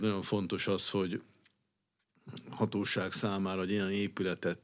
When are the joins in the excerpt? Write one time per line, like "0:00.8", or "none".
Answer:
none